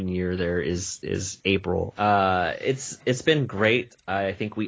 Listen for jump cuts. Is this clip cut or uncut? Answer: cut